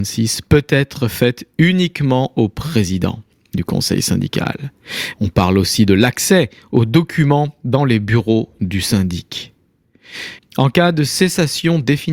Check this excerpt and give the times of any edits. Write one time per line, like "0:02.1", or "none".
0:05.1
0:10.4

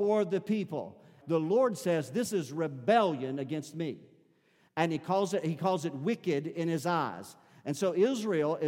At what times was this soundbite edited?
0:01.2

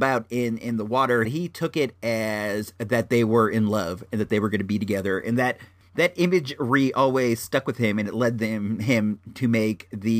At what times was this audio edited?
0:01.3

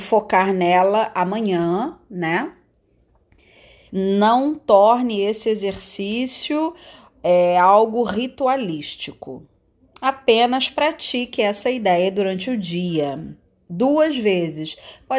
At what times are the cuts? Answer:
0:03.9

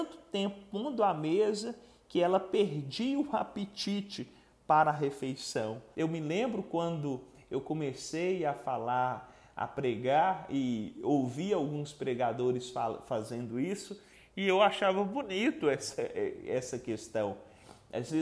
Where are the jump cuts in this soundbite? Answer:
0:05.9

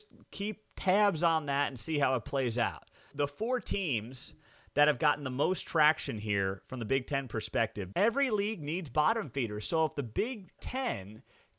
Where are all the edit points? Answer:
0:03.1
0:07.9
0:10.6

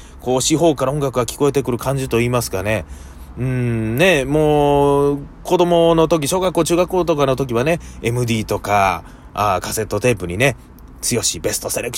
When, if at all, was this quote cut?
none

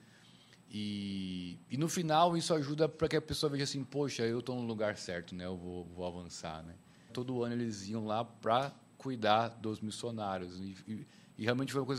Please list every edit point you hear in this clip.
0:07.1

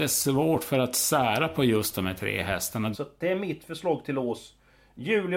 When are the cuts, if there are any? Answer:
0:02.9

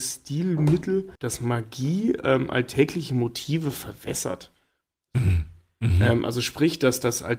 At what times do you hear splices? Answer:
0:01.2

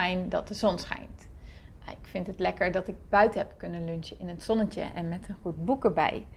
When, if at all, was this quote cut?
none

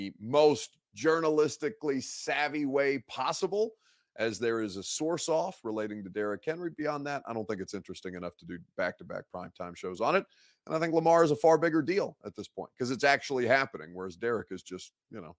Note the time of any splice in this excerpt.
none

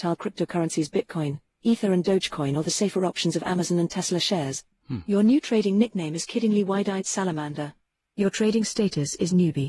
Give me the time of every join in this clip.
none

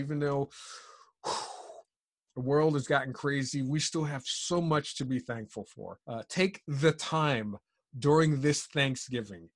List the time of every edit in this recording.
0:06.0

